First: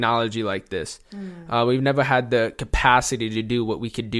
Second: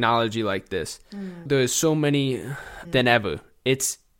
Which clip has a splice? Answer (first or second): second